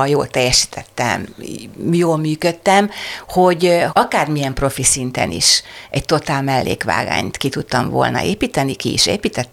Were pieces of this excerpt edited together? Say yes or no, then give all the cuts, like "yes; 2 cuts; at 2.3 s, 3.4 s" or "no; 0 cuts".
yes; 1 cut; at 3.9 s